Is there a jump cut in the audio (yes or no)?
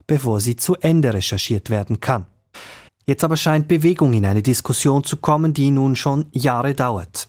no